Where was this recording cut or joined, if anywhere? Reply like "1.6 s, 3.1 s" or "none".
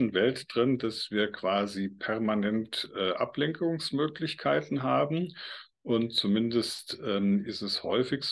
none